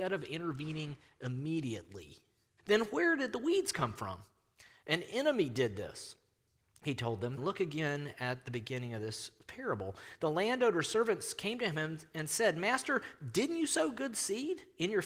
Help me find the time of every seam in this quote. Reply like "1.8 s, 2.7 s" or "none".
2.6 s, 7.4 s